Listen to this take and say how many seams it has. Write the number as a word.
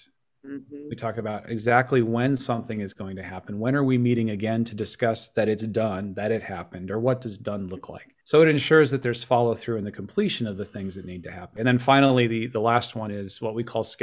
two